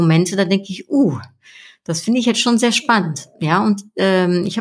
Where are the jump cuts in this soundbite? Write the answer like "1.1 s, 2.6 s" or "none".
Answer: none